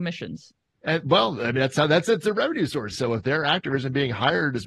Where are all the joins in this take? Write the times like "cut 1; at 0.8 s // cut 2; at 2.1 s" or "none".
cut 1; at 2.9 s